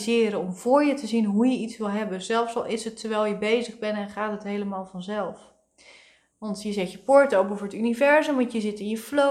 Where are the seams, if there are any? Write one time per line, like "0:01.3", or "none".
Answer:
0:06.3